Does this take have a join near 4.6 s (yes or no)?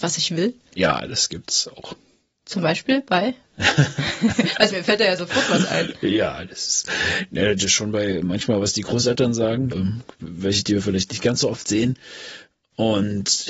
no